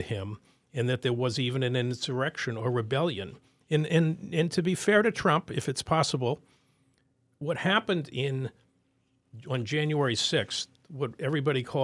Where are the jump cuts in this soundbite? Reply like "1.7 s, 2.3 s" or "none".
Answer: none